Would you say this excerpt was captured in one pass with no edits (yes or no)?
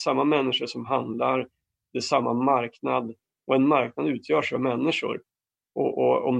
yes